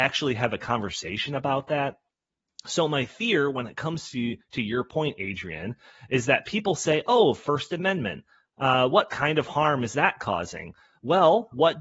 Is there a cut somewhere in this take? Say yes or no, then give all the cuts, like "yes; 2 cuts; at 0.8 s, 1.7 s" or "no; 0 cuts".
no; 0 cuts